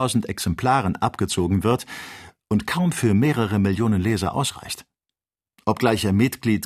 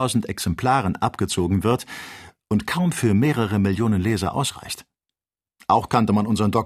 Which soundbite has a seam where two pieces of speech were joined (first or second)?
first